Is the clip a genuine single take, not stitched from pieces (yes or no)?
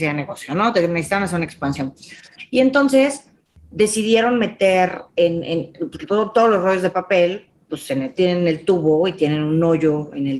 yes